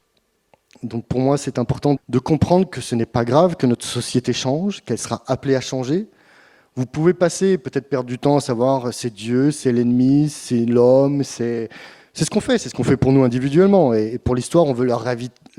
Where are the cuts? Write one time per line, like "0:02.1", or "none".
0:02.0